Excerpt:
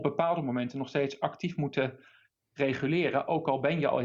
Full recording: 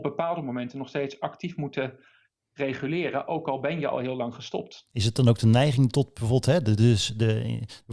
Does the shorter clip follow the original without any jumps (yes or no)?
yes